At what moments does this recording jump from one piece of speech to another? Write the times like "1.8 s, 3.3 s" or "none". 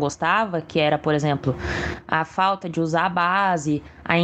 none